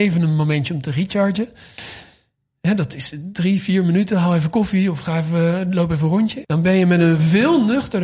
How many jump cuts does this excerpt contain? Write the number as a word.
one